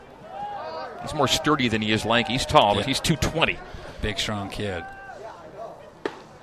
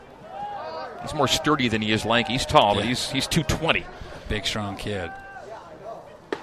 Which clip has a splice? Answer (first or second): first